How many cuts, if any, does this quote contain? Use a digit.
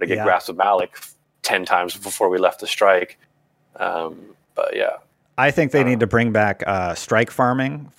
0